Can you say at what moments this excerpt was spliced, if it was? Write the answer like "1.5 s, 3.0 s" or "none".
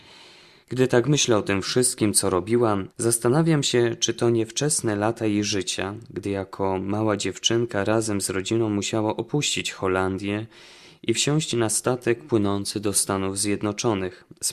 2.9 s